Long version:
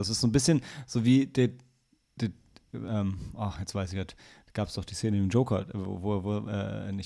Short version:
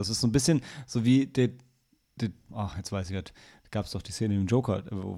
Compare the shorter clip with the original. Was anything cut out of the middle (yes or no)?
yes